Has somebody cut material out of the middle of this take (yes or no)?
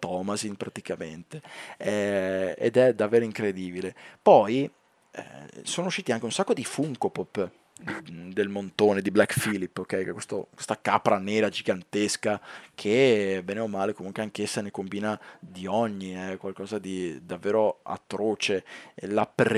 no